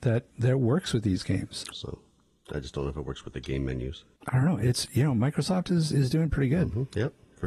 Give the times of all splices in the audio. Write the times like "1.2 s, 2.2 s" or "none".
1.7 s, 4.1 s